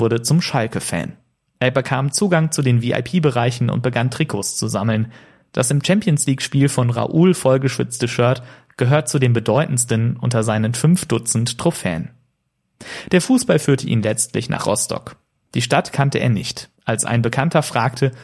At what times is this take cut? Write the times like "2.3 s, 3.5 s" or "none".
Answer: 16.8 s

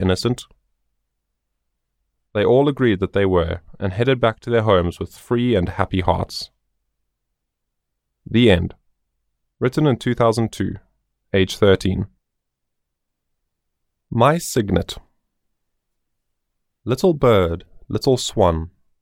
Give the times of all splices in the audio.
none

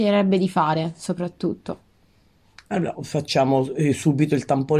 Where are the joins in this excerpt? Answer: 3.0 s

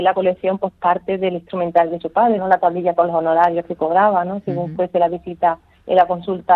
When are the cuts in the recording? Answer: 2.4 s

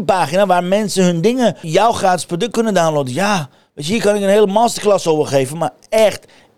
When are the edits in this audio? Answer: 1.6 s

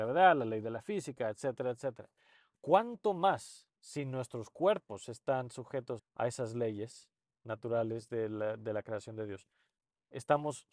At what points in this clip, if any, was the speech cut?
6.0 s

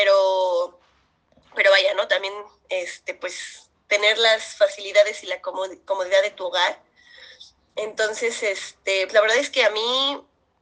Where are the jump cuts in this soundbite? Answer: 9.1 s

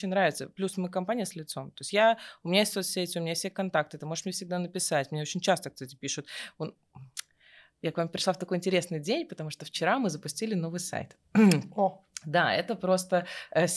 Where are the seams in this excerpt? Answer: none

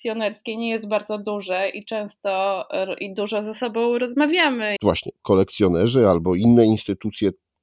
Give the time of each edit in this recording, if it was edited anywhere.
4.8 s

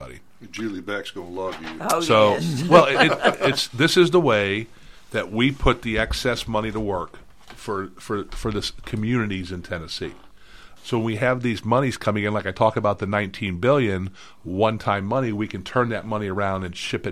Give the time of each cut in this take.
10.8 s

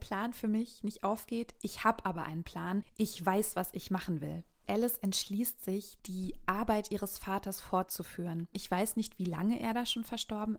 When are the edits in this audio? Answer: 8.5 s

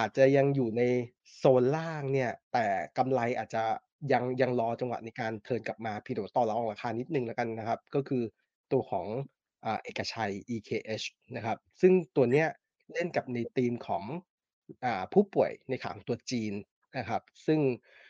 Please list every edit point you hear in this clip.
2.4 s

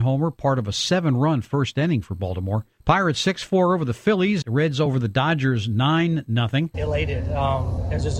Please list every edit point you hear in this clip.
4.4 s, 6.7 s

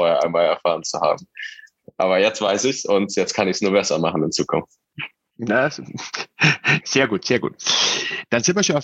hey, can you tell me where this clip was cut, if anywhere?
none

